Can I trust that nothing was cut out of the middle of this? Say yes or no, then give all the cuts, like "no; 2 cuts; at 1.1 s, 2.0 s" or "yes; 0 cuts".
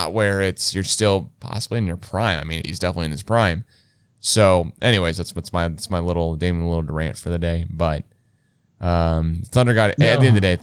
no; 1 cut; at 2.6 s